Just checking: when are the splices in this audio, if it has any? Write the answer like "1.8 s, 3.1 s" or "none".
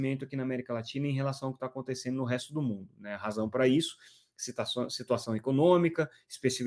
none